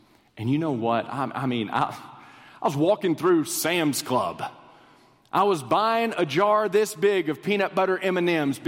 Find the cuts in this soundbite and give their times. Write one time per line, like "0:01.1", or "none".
none